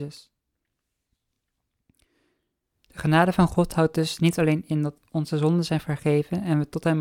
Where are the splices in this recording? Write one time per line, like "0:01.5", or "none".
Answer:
none